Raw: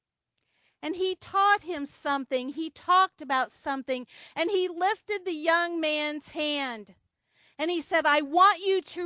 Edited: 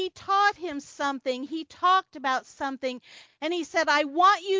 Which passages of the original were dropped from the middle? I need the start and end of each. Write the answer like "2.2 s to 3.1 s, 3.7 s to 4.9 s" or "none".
4.3 s to 7.4 s